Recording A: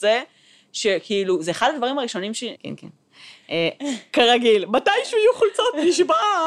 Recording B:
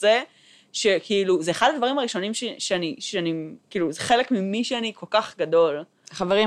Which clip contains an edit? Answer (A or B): A